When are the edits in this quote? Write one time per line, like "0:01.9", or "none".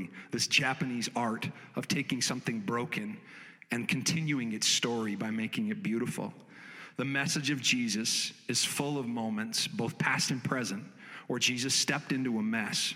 none